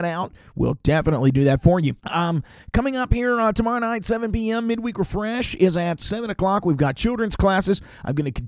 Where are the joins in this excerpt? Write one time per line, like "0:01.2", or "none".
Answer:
0:02.0